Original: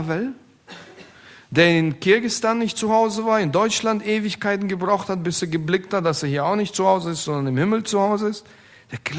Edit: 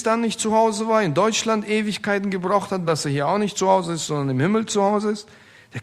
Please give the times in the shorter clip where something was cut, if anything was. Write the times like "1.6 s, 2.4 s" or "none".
2.9 s